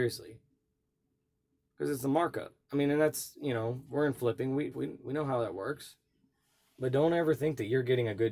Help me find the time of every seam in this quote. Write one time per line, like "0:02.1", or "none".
0:04.7

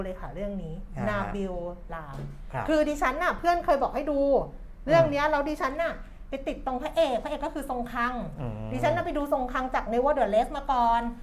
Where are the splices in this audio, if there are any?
0:01.9

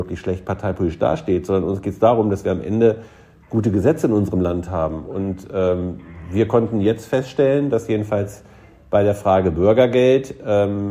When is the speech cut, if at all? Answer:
none

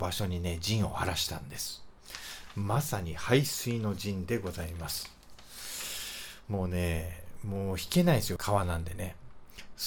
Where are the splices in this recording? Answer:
0:08.4

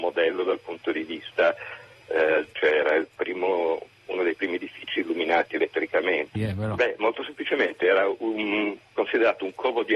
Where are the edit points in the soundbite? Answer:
0:02.5
0:06.3

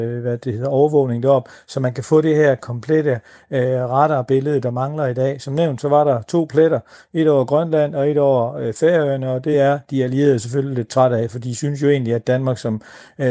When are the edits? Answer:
none

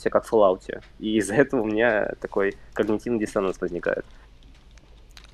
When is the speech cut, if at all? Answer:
none

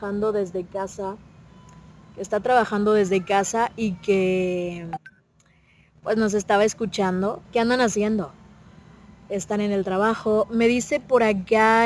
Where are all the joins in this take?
0:07.4

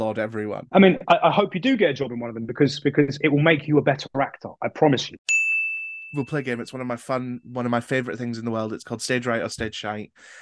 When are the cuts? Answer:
none

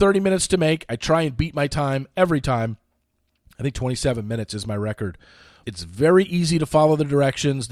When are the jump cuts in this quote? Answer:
0:05.6

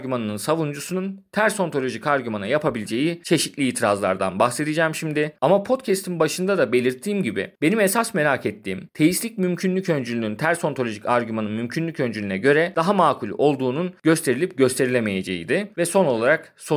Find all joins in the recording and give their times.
0:05.4
0:15.7

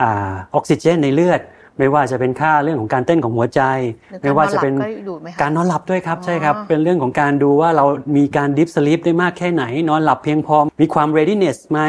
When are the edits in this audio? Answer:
0:10.7

